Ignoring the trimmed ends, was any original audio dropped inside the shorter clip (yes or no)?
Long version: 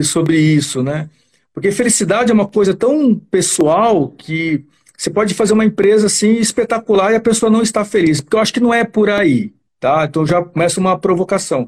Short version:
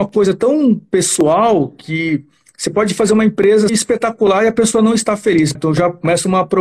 yes